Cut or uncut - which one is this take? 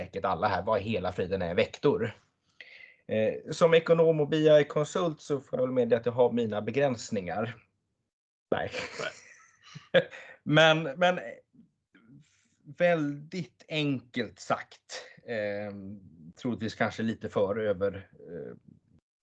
cut